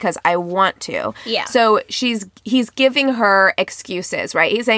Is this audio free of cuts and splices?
yes; 0 cuts

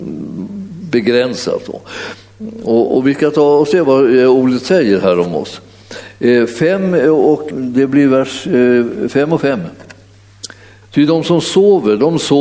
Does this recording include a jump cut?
yes; 2 cuts; at 7.5 s, 10.8 s

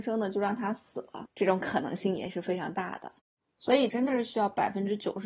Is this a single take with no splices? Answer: no; 1 cut; at 3.9 s

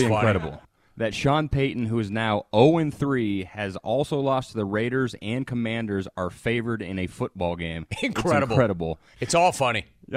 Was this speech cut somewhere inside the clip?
yes; 1 cut; at 9.1 s

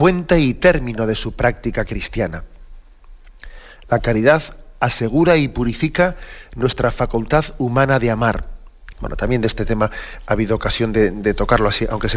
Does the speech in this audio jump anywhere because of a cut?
yes; 1 cut; at 8.9 s

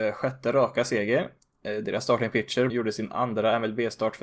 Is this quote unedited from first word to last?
no; 1 cut; at 2.7 s

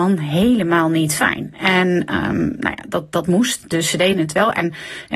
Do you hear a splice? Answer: no; 0 cuts

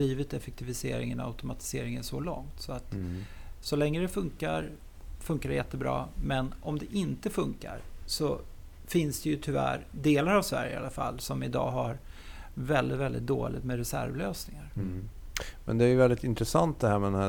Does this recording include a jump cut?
no; 0 cuts

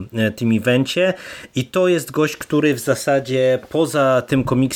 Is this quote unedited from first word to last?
yes; 0 cuts

